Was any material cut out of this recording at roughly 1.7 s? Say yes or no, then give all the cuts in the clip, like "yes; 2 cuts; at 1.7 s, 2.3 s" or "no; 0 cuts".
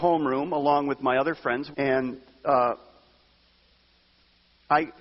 yes; 1 cut; at 1.7 s